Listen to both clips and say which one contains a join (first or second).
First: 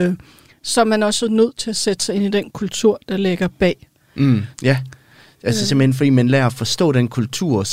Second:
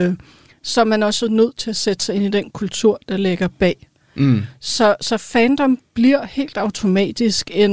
first